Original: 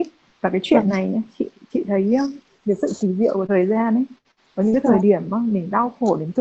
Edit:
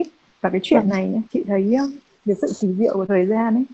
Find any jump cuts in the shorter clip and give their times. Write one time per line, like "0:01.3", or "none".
0:01.3